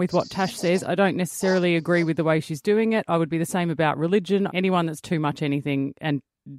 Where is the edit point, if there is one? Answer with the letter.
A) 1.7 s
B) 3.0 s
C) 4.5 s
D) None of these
C